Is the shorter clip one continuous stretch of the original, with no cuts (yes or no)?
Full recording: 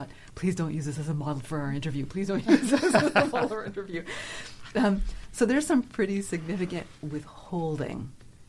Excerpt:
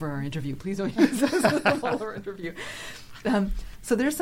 yes